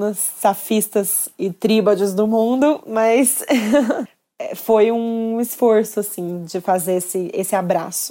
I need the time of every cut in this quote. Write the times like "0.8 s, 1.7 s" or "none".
none